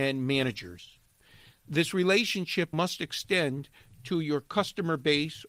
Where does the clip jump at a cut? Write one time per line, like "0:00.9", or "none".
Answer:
0:02.7